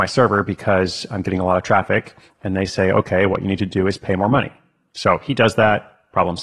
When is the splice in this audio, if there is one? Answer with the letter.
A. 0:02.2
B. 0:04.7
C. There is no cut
C